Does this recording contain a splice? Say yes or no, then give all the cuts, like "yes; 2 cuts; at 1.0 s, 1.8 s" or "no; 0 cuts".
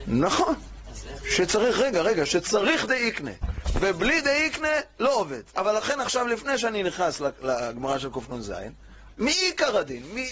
yes; 2 cuts; at 5.5 s, 9.1 s